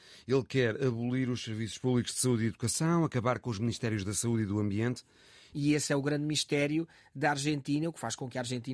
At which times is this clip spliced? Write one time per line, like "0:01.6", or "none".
0:05.5